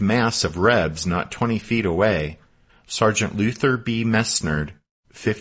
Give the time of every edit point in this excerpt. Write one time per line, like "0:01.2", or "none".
0:02.7